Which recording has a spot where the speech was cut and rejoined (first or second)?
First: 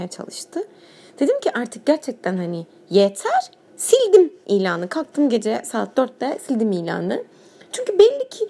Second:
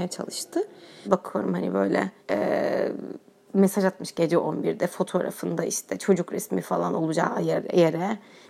second